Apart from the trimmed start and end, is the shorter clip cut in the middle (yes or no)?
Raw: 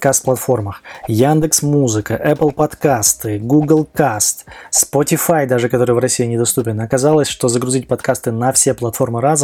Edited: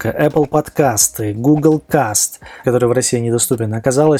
yes